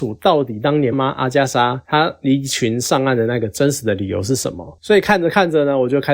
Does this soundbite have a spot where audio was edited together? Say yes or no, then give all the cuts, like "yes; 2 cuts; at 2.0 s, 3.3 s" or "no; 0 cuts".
yes; 1 cut; at 0.9 s